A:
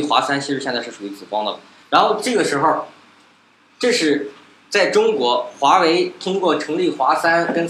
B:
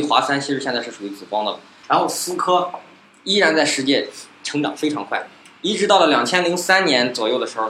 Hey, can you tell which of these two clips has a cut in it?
B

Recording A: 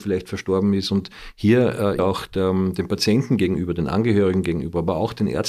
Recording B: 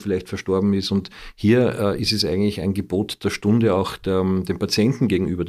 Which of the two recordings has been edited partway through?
A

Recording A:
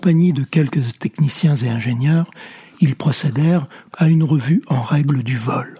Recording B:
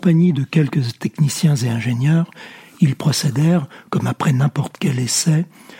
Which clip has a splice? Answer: A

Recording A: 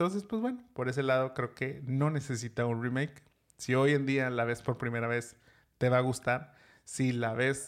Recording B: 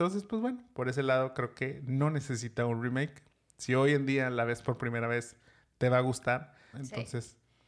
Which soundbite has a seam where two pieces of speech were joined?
B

